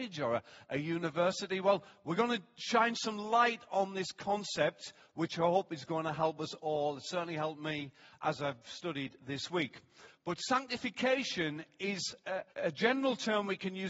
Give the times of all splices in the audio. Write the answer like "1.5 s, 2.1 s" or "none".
8.2 s, 12.5 s